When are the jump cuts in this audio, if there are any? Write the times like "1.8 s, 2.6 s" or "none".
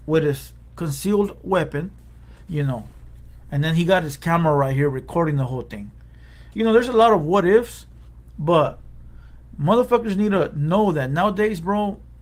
2.5 s